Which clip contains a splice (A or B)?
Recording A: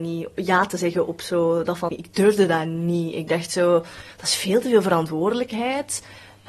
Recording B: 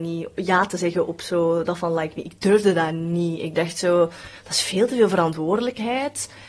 A